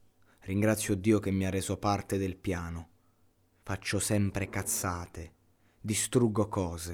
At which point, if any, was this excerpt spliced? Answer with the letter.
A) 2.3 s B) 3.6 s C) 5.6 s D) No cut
B